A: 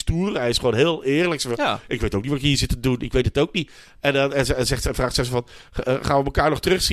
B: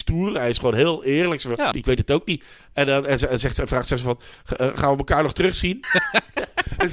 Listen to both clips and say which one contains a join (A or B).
B